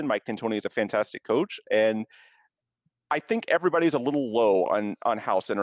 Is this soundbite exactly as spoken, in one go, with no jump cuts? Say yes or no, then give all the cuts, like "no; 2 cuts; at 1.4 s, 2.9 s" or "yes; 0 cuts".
yes; 0 cuts